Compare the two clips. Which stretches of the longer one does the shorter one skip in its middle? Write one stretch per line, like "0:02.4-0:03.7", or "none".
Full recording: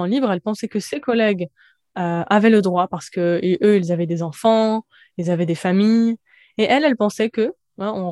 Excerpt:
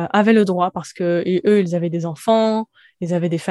none